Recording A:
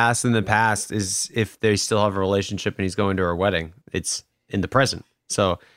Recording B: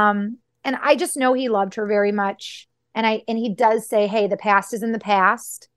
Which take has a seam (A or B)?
A